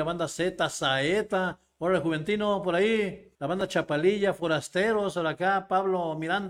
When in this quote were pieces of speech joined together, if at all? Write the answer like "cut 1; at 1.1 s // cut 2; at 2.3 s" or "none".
cut 1; at 3.3 s